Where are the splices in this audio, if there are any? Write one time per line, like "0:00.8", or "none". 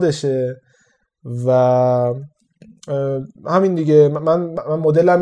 none